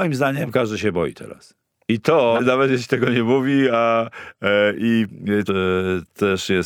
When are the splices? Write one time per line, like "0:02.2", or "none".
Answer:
0:02.4
0:05.5